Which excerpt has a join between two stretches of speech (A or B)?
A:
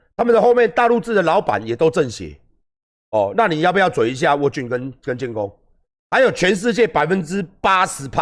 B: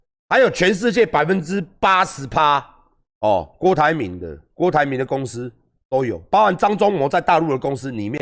B